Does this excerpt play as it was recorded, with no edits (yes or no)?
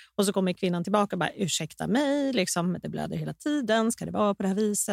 yes